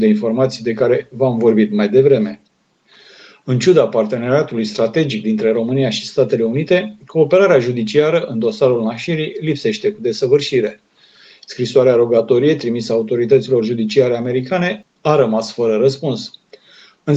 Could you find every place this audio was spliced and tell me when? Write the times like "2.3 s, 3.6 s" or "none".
none